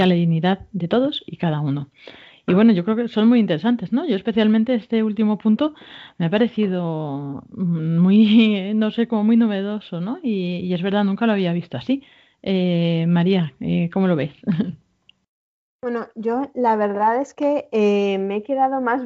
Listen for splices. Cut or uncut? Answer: uncut